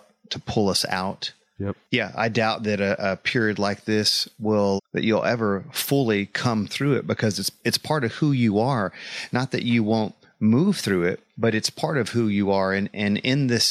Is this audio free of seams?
no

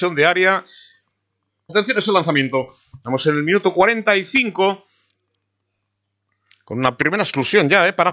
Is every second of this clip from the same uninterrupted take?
no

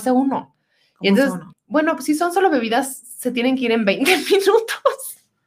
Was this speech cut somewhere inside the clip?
yes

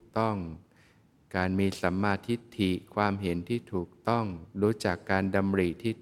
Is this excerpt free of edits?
no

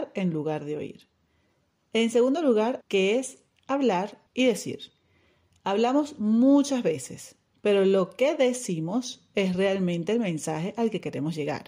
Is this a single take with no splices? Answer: no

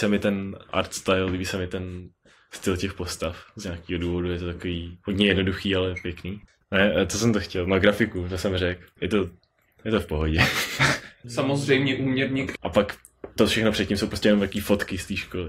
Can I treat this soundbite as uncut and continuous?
no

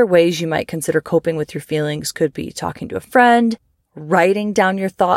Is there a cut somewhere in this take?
yes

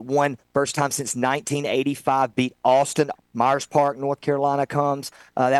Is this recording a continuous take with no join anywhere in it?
no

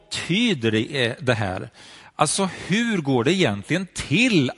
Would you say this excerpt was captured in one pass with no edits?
yes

